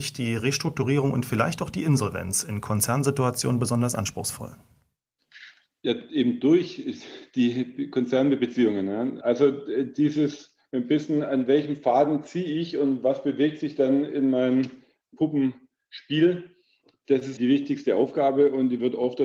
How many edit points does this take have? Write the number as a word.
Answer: one